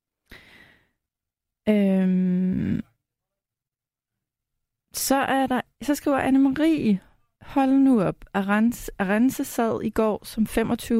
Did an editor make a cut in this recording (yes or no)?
no